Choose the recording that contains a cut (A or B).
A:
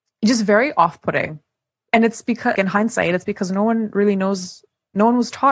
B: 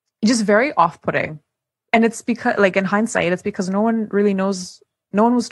A